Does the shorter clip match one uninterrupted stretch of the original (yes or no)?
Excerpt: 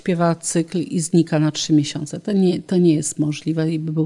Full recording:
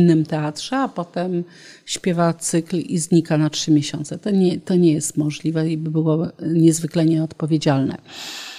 yes